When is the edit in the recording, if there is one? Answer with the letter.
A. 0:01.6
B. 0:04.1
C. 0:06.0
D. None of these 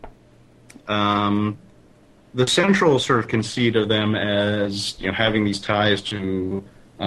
D